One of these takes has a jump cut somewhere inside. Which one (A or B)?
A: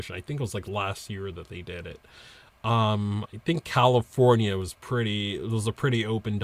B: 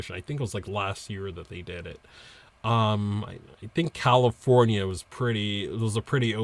A